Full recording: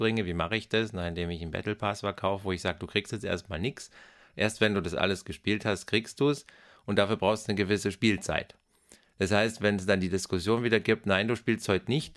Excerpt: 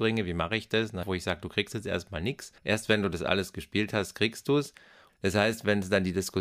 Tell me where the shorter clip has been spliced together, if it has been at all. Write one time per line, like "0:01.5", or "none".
0:01.0
0:02.6
0:05.1